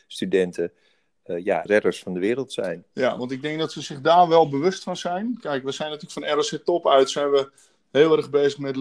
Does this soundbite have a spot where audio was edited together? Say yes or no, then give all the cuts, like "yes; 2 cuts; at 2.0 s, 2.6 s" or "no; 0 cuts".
yes; 1 cut; at 1.7 s